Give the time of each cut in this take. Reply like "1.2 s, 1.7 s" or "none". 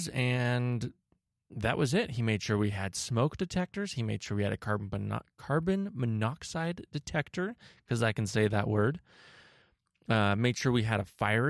none